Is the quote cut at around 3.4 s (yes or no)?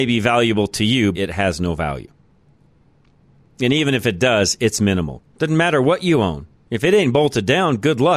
no